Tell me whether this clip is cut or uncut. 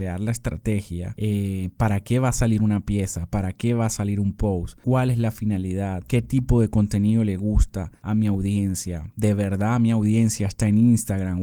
uncut